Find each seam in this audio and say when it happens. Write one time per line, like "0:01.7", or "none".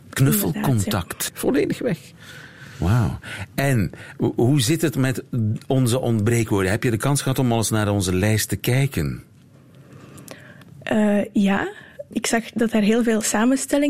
0:01.3
0:12.1

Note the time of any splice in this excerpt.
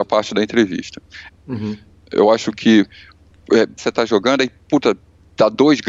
0:01.3
0:03.8

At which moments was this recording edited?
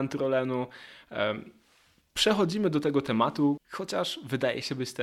0:03.6

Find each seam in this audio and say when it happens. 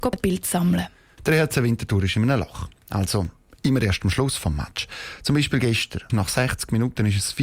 0:01.2
0:06.1

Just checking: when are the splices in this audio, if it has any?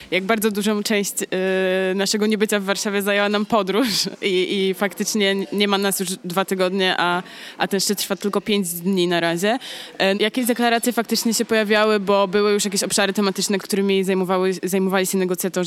0:10.1
0:13.6

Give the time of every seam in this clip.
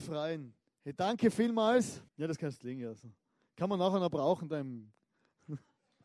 0:02.1

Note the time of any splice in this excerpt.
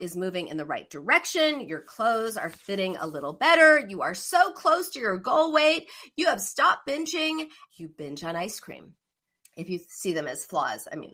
0:07.7
0:09.4

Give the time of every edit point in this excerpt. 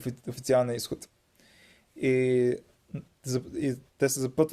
none

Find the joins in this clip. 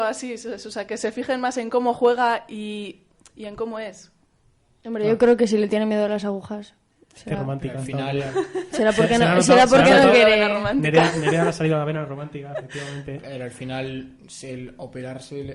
none

